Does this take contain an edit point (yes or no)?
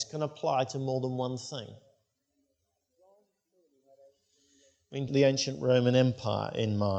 yes